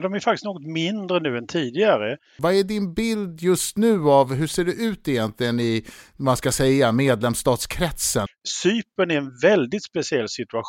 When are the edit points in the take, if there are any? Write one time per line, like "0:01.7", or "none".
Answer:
0:02.4
0:08.3